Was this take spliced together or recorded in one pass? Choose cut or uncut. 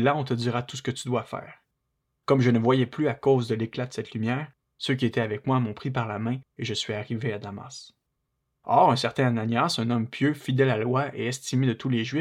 uncut